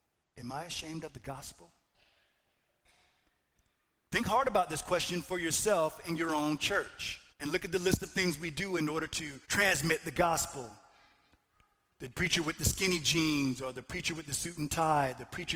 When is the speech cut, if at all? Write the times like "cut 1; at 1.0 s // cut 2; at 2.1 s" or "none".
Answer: cut 1; at 7.3 s // cut 2; at 9.4 s